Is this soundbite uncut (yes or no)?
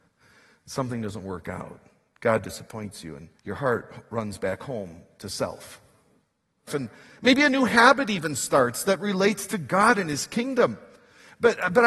no